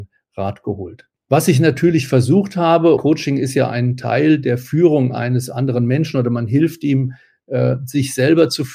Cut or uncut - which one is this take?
cut